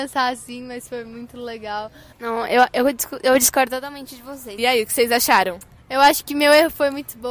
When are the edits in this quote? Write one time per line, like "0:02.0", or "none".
0:02.1
0:04.6